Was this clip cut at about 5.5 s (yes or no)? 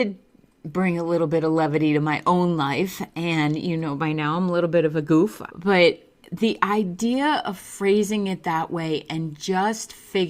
yes